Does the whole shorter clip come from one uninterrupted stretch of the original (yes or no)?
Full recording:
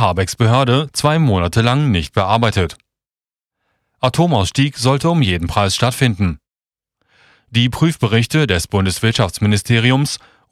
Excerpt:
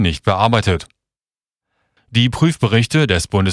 no